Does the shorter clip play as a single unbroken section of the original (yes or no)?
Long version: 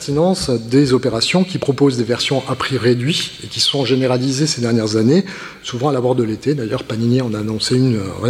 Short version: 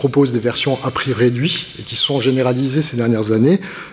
yes